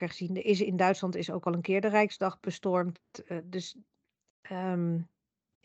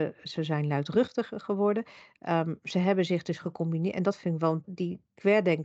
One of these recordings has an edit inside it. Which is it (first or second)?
second